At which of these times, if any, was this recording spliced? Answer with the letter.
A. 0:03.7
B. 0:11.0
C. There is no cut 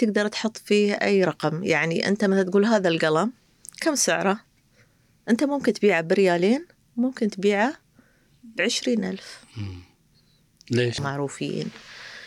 B